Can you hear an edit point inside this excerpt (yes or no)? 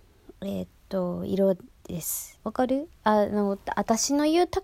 yes